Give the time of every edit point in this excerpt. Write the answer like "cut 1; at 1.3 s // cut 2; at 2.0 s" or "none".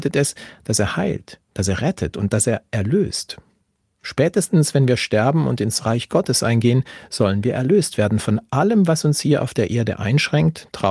none